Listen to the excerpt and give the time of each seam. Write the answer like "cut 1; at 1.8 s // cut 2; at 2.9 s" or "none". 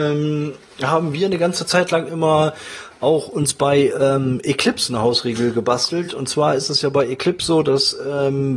none